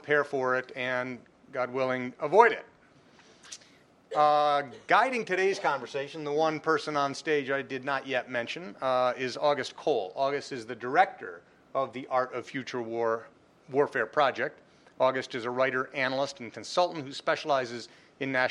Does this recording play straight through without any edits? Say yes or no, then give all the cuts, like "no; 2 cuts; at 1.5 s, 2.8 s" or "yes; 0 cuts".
yes; 0 cuts